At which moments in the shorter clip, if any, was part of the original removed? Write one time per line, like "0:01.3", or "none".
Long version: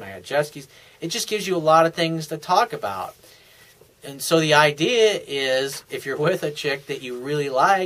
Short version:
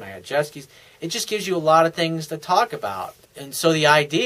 0:03.2